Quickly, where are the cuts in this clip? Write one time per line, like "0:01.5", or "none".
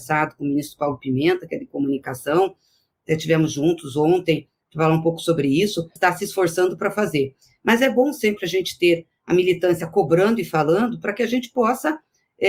0:06.0